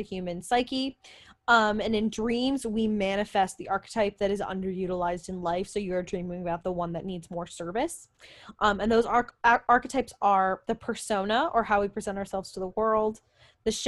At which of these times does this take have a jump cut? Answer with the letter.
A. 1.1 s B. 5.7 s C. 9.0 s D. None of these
D